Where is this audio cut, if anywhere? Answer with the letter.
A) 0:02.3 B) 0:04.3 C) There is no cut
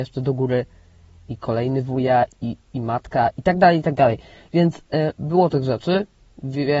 A